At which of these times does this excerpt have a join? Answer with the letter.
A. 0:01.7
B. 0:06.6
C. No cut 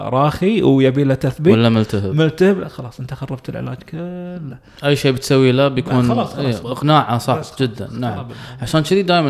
B